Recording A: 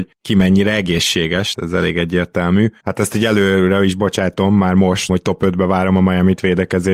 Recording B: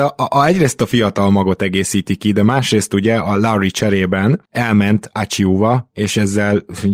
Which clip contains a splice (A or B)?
A